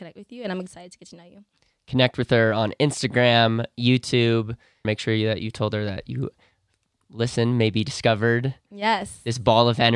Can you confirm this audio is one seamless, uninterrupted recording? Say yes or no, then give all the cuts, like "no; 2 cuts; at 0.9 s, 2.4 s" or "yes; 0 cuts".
no; 1 cut; at 4.8 s